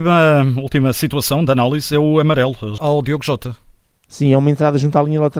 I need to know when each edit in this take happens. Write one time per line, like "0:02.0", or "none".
0:02.8